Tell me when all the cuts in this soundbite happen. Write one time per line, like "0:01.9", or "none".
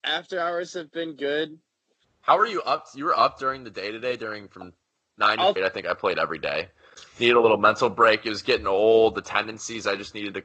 0:05.6